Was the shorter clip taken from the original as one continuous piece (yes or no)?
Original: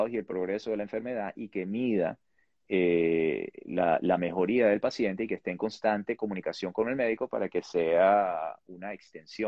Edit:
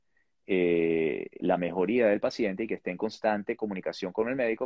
no